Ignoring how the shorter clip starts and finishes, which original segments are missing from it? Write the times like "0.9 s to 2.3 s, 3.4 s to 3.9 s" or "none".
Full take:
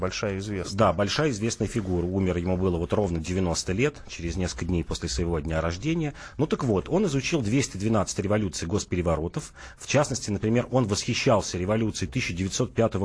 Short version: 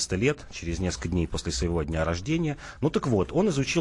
none